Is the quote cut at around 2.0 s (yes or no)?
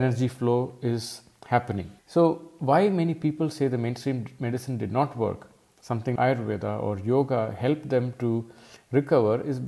yes